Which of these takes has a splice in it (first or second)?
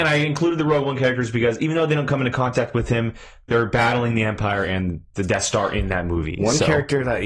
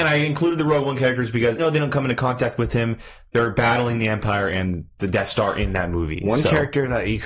second